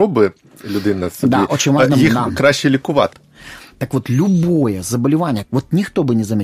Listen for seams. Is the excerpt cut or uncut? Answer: cut